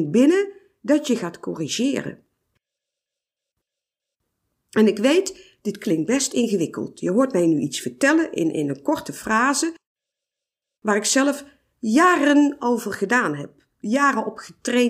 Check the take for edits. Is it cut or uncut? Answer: uncut